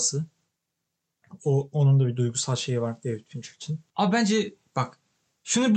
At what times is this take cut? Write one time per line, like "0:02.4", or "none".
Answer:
0:03.9